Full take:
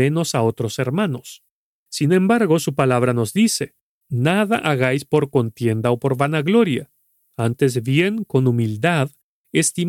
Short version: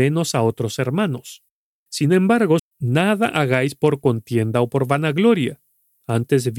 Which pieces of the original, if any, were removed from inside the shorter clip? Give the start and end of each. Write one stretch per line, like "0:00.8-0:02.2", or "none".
0:02.6-0:03.9